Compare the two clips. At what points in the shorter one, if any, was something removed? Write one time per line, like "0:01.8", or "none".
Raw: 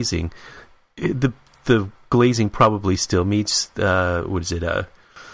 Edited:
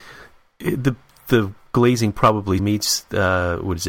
0:02.6